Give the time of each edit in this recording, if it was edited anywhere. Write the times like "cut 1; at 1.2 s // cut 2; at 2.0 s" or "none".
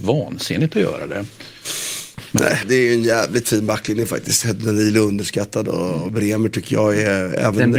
cut 1; at 2.6 s